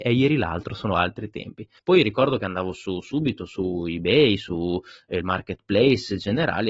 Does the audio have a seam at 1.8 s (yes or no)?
yes